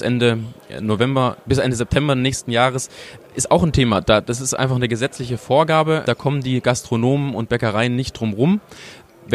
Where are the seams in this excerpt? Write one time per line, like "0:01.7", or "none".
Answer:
none